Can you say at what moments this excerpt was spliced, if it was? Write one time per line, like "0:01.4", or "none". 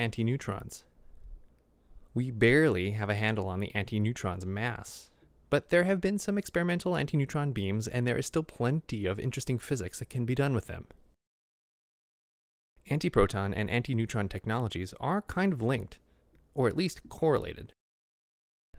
0:02.1